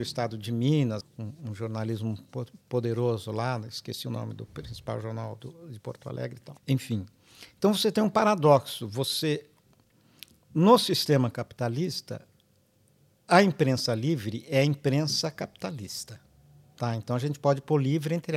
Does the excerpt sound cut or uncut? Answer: cut